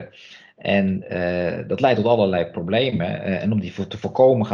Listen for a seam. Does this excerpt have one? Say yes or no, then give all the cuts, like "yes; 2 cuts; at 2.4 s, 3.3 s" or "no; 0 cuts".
no; 0 cuts